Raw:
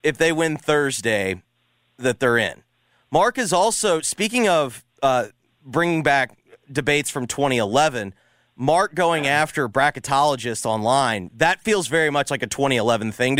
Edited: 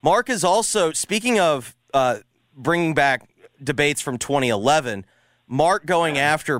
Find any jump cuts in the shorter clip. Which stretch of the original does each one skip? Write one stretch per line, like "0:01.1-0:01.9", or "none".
none